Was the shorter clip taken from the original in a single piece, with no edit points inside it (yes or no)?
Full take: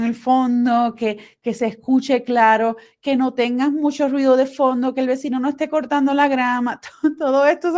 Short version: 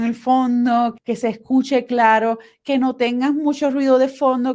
no